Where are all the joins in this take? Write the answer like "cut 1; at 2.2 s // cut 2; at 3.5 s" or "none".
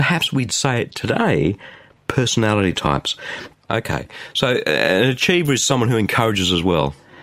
cut 1; at 3.5 s